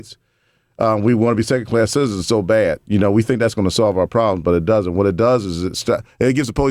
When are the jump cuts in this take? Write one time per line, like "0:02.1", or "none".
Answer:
none